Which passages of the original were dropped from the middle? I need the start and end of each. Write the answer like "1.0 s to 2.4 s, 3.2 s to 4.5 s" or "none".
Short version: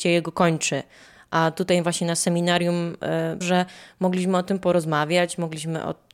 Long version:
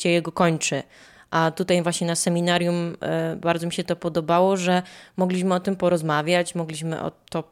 3.4 s to 4.6 s